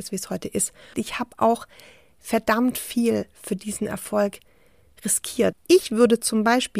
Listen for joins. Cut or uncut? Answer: cut